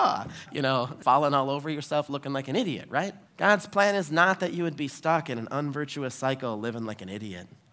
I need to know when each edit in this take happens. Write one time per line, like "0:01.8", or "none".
0:01.0
0:03.3